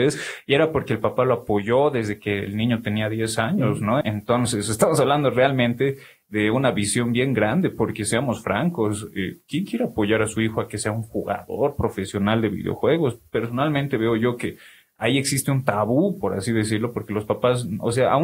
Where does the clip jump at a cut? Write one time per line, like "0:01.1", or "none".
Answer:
0:04.0